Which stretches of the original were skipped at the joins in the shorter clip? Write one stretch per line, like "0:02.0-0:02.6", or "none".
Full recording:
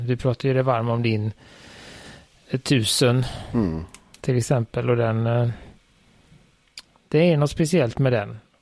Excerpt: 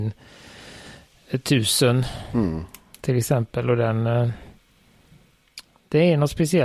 none